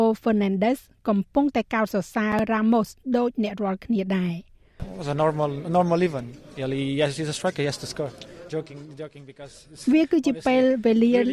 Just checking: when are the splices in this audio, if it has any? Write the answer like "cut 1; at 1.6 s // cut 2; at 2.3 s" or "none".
cut 1; at 8.5 s